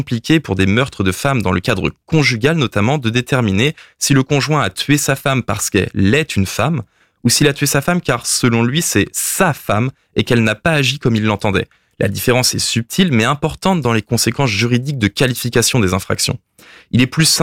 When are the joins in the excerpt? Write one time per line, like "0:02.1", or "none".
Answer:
none